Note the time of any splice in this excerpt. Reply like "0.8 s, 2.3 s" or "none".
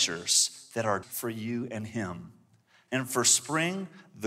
1.0 s, 2.9 s